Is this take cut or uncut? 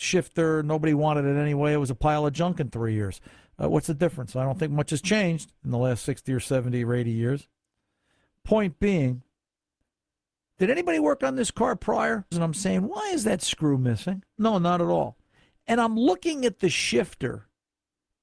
cut